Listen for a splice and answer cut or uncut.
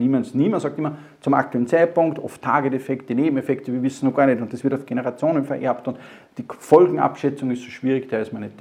uncut